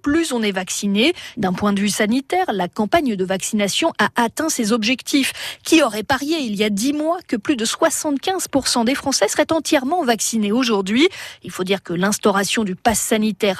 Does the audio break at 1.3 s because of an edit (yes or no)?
yes